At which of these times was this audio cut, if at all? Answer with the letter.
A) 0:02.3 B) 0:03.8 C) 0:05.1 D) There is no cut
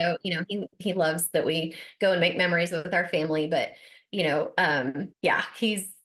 C